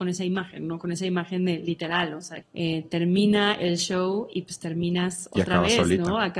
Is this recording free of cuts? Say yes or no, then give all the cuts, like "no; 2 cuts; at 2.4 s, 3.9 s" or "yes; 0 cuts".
no; 1 cut; at 2.4 s